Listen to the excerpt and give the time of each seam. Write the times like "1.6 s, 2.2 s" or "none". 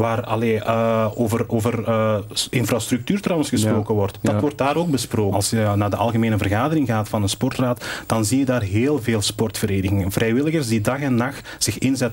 4.2 s, 5.3 s